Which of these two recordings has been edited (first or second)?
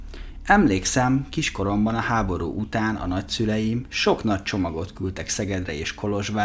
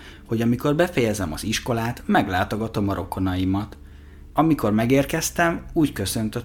second